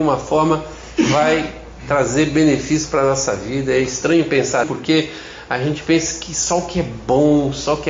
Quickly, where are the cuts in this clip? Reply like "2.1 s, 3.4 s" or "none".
4.6 s